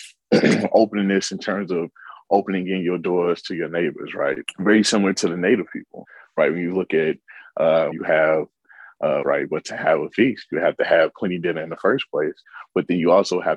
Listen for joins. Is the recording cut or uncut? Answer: cut